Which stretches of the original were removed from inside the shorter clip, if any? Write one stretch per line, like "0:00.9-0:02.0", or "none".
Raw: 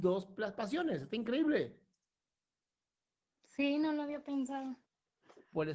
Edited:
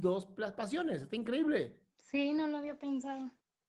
0:01.9-0:03.3